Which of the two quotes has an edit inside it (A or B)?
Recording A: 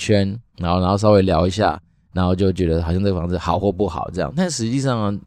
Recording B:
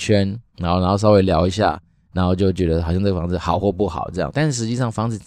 B